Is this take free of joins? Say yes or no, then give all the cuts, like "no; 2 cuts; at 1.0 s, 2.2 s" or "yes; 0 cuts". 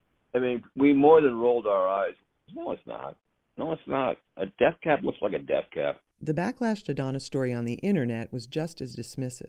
no; 1 cut; at 2.5 s